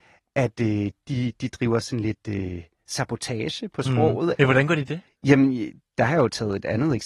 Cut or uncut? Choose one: cut